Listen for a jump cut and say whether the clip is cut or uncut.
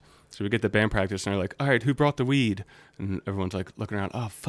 uncut